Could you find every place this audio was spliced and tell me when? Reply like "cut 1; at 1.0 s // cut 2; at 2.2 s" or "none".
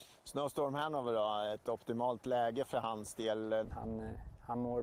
cut 1; at 3.6 s